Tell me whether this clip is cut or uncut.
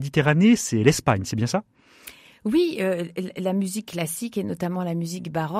uncut